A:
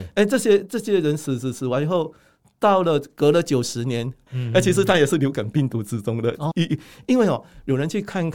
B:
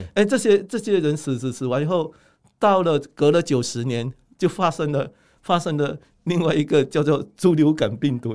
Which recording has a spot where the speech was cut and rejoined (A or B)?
A